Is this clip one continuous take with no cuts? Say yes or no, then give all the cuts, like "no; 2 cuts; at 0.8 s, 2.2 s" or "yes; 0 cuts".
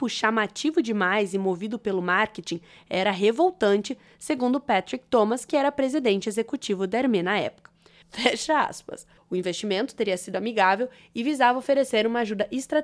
no; 2 cuts; at 8.0 s, 9.2 s